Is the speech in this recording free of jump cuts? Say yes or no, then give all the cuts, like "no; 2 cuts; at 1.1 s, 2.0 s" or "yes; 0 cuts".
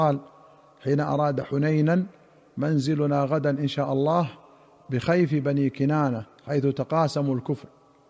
no; 1 cut; at 6.4 s